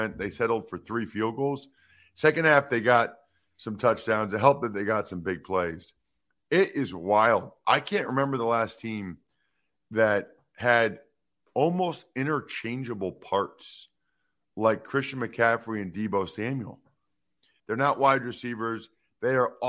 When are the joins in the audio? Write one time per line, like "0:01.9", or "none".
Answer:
0:17.6